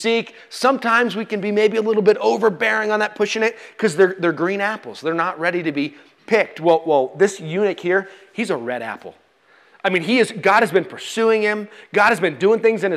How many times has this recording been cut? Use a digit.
0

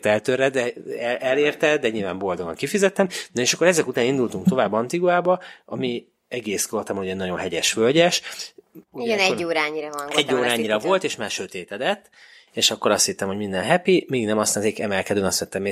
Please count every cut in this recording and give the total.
0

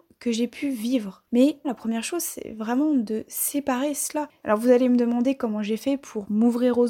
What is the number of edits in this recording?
2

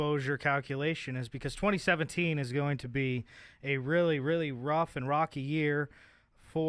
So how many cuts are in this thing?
0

